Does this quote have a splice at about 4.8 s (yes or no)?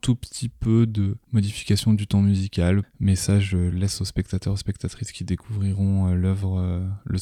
no